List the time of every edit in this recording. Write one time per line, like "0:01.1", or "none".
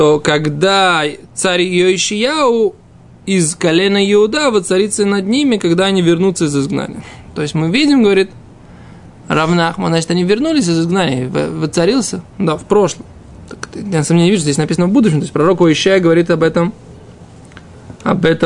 none

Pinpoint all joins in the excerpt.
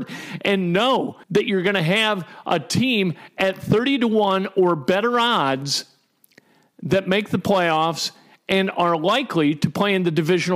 0:01.2

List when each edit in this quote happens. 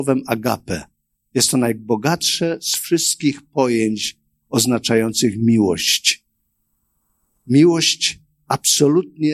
none

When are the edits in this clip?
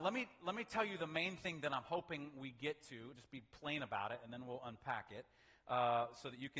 none

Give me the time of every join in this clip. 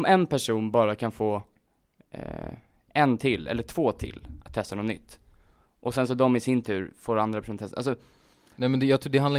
none

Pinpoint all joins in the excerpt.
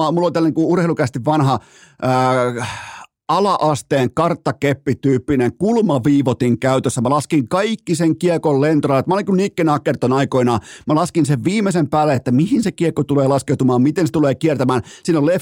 none

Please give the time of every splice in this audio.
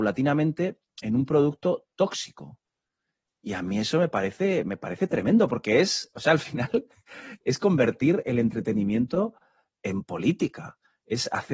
none

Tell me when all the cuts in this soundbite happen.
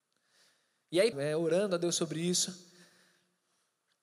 0:01.1

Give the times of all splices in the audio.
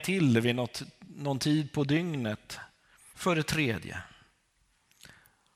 0:03.1

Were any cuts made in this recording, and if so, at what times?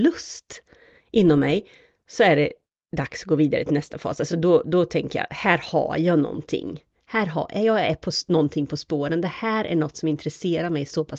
none

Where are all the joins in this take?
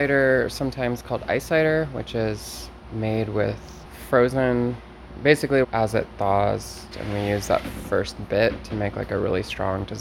0:05.6
0:06.9

